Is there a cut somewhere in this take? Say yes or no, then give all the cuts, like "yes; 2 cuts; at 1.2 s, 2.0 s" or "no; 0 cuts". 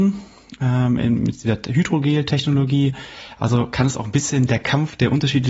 no; 0 cuts